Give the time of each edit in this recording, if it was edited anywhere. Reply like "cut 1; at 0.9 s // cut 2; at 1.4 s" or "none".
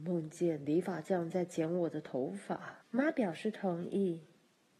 cut 1; at 2.8 s